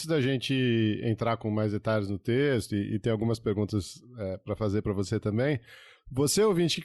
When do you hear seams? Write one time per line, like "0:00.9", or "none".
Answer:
none

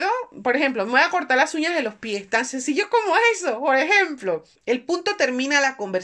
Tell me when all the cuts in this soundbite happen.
0:04.6

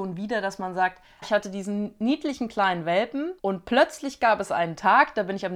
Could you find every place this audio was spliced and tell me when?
0:01.2
0:03.4

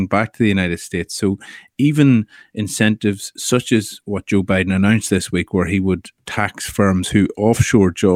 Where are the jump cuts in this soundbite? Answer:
none

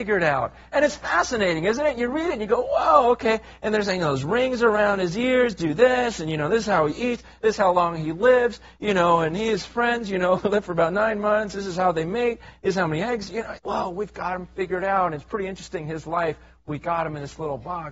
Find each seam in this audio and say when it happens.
0:13.6

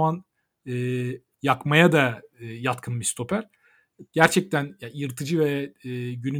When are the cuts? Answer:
0:01.3
0:04.1

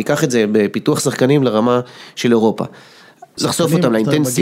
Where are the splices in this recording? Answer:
0:03.4

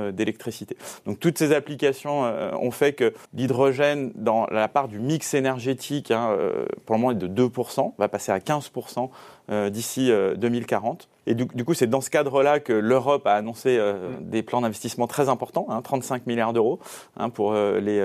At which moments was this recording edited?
0:03.2

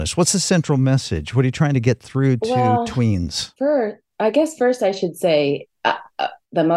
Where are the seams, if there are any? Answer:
none

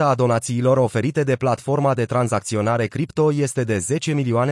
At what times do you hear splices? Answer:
none

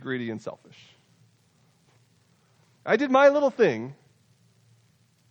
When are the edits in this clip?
0:01.9

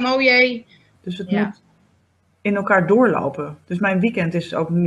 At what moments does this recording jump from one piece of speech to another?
0:00.9

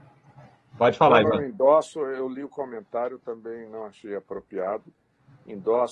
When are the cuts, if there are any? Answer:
none

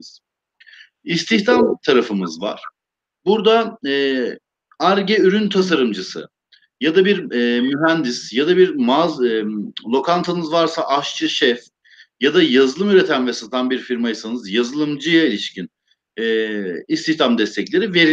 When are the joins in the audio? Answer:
0:03.1

